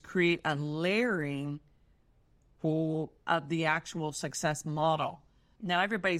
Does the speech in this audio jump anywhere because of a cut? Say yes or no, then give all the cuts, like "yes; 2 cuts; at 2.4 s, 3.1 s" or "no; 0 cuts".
no; 0 cuts